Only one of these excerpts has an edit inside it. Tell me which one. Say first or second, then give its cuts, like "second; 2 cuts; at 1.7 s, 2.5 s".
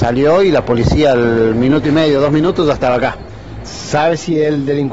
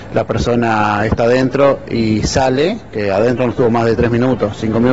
first; 1 cut; at 3.6 s